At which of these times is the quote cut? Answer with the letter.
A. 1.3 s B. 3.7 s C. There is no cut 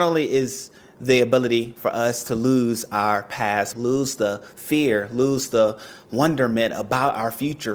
B